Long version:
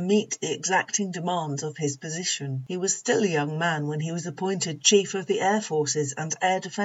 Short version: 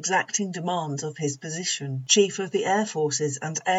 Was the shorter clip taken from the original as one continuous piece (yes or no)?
no